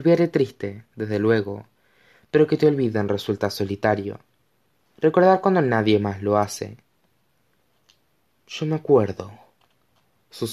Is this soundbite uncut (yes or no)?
yes